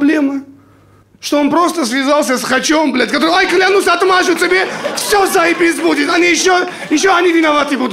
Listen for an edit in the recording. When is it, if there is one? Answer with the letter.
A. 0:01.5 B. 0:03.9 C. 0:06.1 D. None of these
D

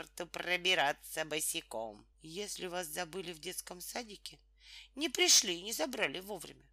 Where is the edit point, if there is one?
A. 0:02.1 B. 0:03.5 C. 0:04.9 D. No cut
A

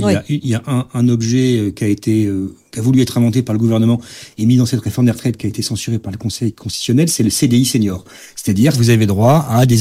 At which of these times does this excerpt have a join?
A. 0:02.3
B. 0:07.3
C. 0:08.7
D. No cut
C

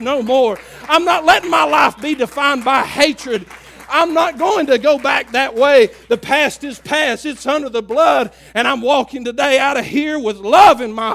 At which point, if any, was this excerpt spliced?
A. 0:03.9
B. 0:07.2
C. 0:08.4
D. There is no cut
D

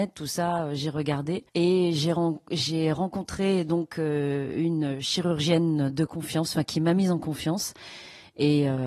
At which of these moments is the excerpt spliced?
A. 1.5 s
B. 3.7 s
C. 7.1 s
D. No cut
A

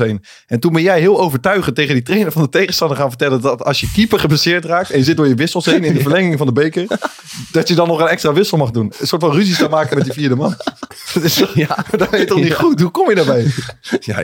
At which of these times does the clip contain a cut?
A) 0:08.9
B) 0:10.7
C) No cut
A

